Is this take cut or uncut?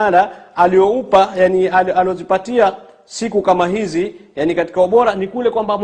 uncut